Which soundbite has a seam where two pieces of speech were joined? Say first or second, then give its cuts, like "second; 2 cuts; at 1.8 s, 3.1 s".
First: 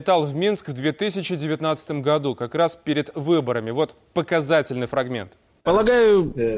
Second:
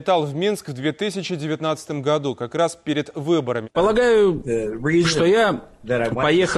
second; 1 cut; at 3.6 s